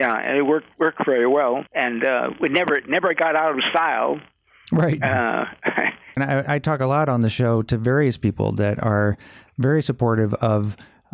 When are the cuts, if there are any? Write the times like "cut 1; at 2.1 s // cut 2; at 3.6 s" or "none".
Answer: cut 1; at 1.7 s // cut 2; at 6.2 s